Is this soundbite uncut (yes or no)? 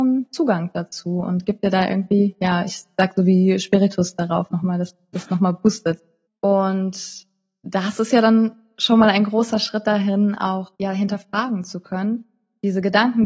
no